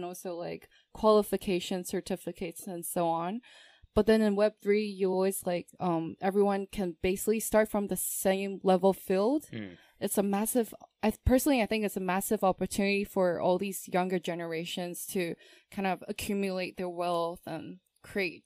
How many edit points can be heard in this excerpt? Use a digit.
0